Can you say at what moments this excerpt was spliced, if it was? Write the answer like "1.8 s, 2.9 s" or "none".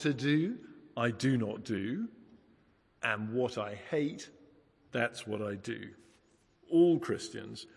none